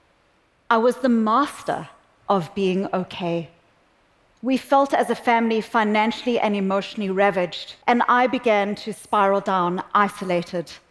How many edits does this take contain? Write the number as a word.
two